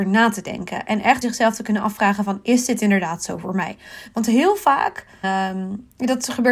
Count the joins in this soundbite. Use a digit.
2